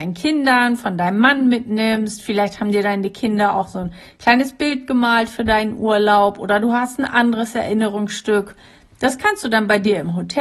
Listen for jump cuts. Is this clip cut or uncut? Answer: uncut